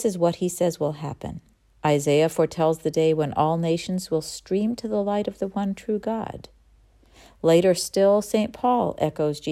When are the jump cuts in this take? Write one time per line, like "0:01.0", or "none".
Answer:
0:01.7